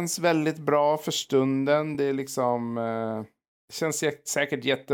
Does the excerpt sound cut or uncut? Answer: uncut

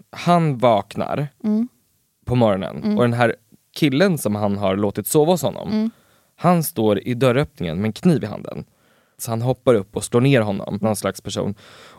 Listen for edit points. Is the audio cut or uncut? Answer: cut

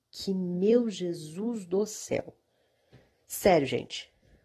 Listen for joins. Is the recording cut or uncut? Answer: uncut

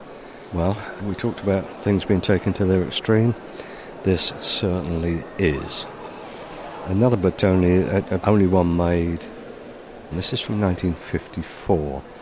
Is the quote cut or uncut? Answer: cut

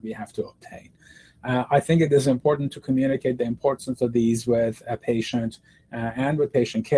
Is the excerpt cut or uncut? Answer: uncut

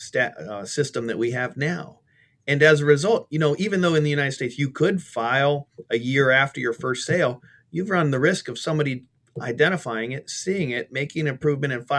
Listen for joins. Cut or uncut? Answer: uncut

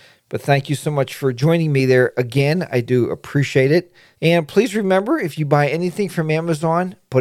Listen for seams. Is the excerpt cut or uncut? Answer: cut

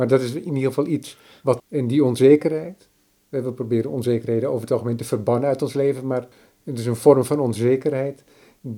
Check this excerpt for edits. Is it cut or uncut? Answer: cut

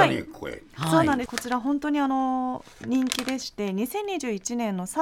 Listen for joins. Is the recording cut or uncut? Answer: cut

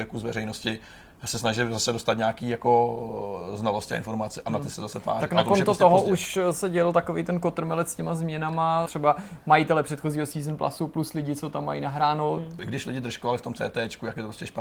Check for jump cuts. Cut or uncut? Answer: cut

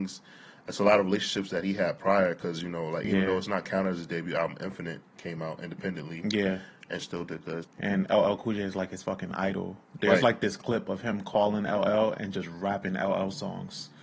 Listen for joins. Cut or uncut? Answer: cut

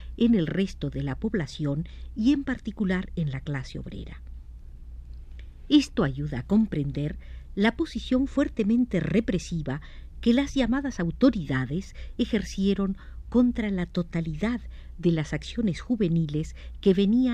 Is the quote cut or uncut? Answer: uncut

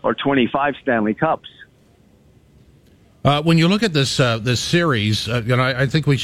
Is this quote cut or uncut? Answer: uncut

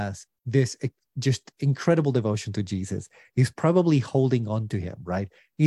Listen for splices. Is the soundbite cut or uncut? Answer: uncut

